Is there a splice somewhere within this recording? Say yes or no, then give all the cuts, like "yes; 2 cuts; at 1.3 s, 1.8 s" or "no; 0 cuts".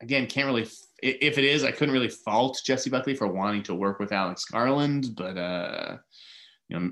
no; 0 cuts